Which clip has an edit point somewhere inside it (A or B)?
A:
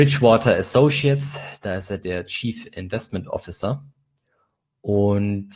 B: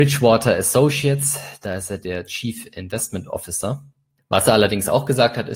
B